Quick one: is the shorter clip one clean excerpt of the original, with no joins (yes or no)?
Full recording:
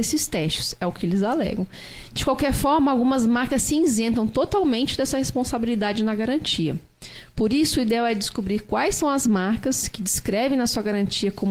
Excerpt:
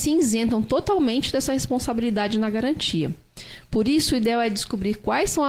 yes